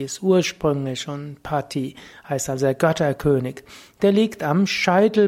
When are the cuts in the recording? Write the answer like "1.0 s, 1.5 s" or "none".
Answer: none

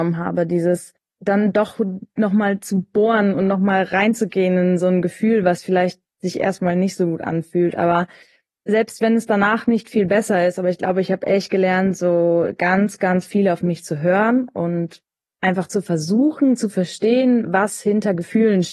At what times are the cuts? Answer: none

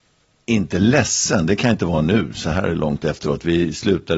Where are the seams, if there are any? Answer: none

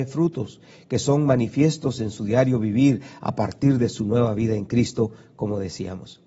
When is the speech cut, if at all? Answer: none

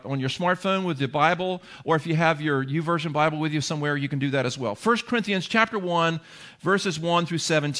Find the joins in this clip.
none

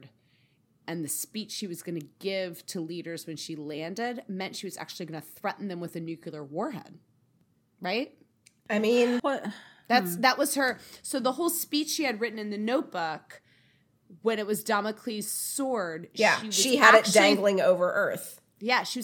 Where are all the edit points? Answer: 9.2 s

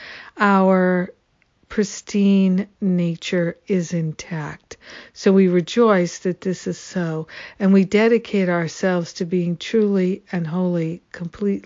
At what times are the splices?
none

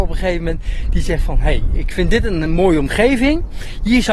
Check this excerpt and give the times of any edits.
none

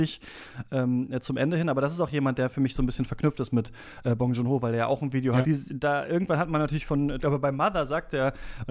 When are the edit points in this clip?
5.4 s, 7.2 s

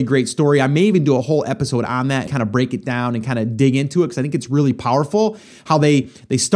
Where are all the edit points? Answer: 2.3 s

